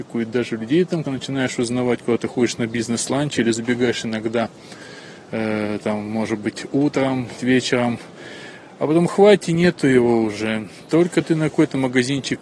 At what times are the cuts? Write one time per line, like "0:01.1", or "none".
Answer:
0:01.0
0:07.4